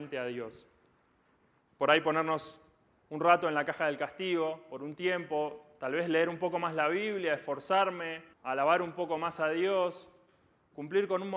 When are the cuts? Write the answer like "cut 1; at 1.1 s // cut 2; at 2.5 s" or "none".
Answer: cut 1; at 1.6 s // cut 2; at 8.3 s